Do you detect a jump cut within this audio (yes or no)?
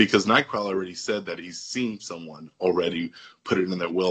no